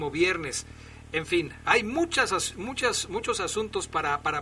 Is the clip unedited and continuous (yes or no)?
yes